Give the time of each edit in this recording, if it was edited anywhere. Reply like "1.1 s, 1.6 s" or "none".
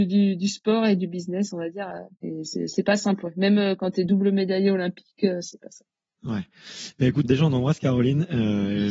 2.1 s, 7.2 s